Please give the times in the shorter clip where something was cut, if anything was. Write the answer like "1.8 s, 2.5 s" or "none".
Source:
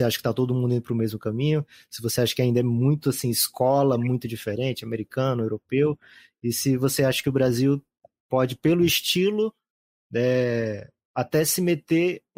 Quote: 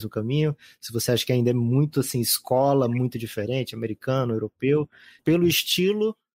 5.2 s